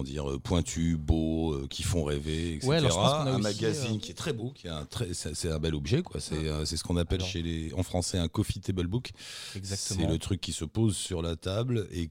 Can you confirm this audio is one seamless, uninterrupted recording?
yes; 0 cuts

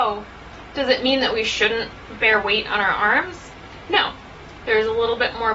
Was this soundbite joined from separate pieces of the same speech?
yes; 1 cut; at 4.6 s

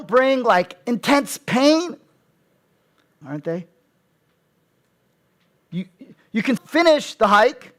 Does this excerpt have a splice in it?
yes; 2 cuts; at 3.2 s, 6.6 s

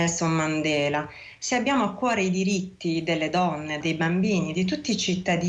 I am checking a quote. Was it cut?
yes; 1 cut; at 3.8 s

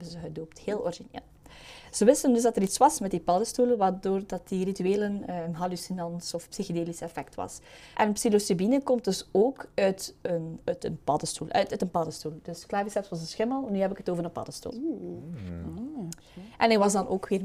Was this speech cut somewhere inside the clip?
yes; 3 cuts; at 5.5 s, 7.9 s, 14.7 s

